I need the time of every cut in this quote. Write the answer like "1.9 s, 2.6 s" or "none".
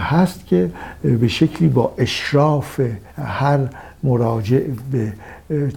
3.1 s